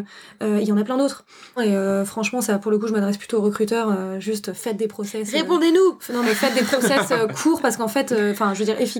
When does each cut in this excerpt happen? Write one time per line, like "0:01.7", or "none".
0:01.6